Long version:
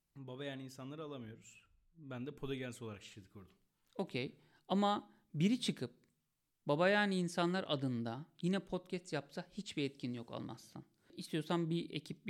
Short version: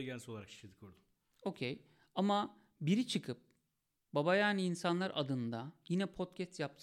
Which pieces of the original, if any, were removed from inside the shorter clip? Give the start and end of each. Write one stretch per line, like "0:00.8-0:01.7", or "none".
none